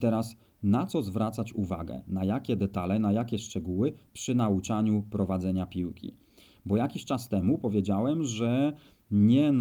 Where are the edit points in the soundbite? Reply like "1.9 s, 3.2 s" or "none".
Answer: none